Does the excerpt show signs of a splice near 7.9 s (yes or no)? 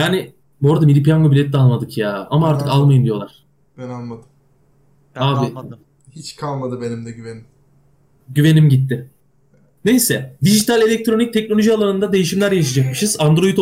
no